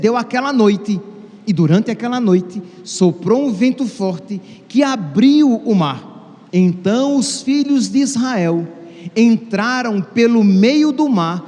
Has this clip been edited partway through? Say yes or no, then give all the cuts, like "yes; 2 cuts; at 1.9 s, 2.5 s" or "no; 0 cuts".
yes; 1 cut; at 6.5 s